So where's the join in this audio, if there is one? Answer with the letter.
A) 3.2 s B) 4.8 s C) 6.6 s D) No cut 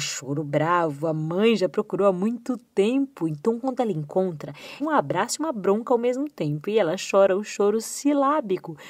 B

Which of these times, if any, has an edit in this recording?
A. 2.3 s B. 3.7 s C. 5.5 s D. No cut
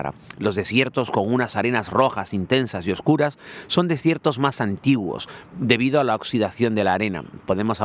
D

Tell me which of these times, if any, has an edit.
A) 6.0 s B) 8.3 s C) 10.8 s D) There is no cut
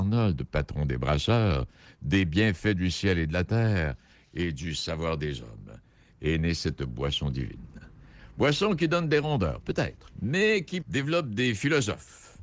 C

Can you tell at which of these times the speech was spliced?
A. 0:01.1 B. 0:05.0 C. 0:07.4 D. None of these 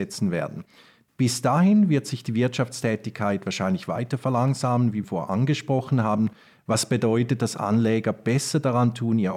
B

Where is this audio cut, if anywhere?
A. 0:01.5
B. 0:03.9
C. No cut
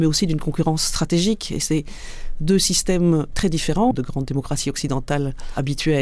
B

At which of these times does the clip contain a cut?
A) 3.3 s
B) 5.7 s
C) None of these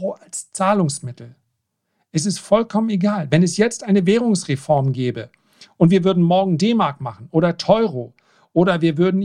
C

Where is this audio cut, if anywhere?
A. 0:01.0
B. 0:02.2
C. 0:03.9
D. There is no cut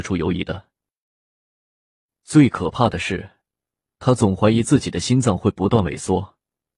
D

